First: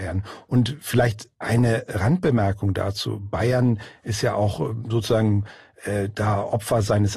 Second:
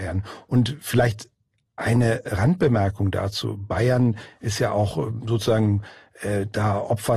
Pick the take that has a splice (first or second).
first